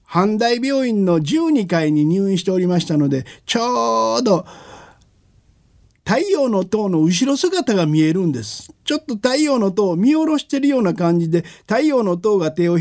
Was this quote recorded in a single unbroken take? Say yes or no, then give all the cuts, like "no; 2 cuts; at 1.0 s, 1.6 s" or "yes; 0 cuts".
yes; 0 cuts